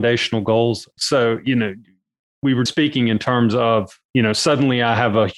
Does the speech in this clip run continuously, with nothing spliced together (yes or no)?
no